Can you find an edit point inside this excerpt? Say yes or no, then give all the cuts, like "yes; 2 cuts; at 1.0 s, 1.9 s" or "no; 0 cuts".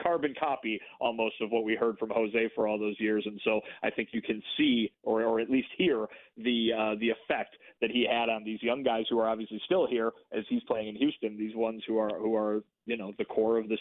no; 0 cuts